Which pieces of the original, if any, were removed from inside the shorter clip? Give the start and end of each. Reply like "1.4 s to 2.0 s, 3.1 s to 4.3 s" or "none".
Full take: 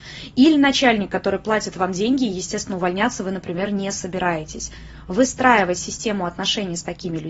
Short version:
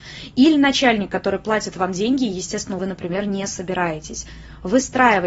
2.8 s to 3.2 s